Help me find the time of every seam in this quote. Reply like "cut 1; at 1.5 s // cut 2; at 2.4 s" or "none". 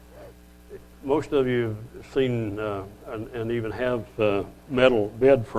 none